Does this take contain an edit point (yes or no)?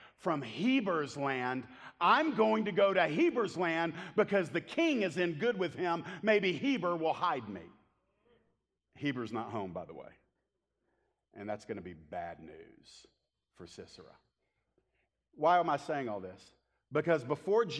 no